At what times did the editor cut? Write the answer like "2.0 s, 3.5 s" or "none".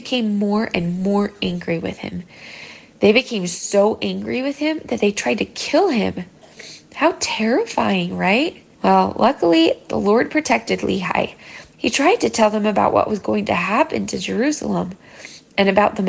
8.7 s, 11.7 s